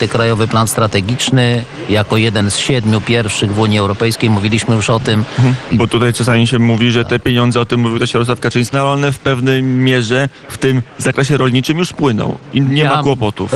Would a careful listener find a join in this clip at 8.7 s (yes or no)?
yes